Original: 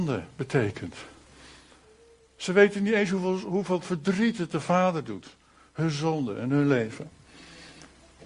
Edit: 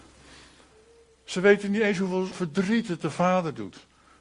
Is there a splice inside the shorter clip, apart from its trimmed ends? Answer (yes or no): yes